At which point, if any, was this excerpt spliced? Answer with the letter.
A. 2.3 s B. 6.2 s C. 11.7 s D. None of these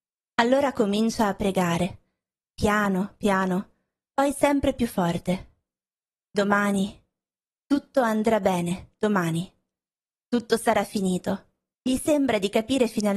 C